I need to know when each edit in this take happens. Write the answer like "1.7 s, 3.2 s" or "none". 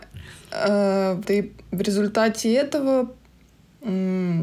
1.2 s

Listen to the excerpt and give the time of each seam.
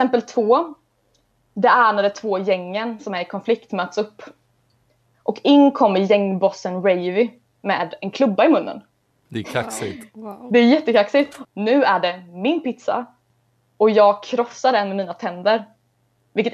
9.3 s, 11.4 s

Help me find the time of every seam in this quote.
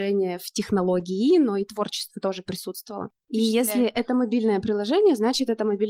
3.2 s

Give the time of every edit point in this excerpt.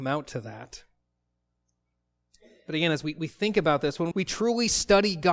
4.1 s

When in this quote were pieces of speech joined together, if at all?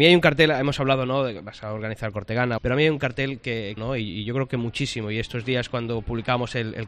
2.6 s, 3.8 s

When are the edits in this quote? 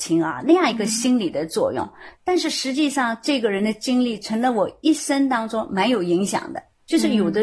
none

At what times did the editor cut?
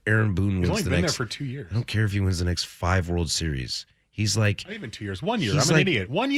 none

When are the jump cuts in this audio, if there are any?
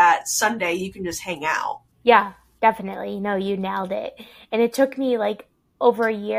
1.9 s

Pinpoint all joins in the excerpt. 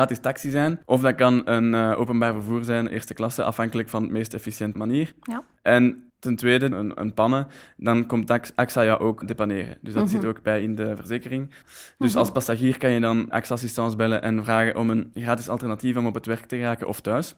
6.7 s, 11.6 s, 13.3 s

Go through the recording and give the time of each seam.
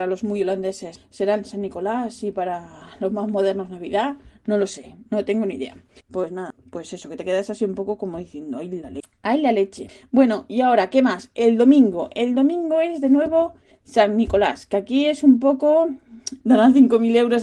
6.0 s, 16.4 s

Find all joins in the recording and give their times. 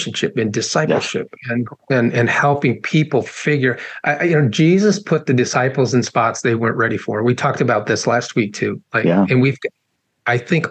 none

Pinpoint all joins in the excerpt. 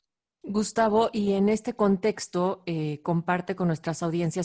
none

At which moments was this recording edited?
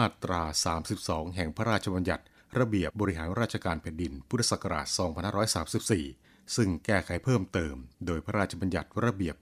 2.9 s, 7.9 s

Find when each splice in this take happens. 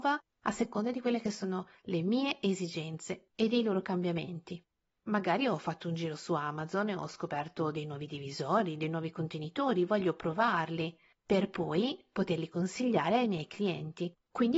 none

